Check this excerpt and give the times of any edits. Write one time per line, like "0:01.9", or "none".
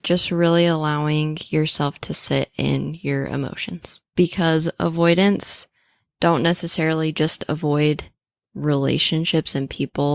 0:04.1